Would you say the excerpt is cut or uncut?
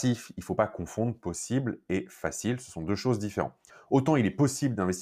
uncut